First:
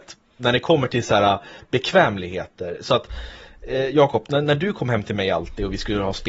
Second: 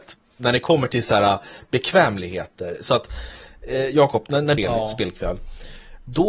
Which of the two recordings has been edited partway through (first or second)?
second